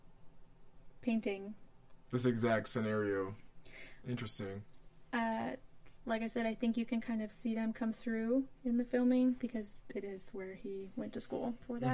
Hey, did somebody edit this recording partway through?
yes; 1 cut; at 6.0 s

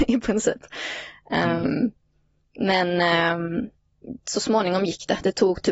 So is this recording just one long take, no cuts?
yes; 0 cuts

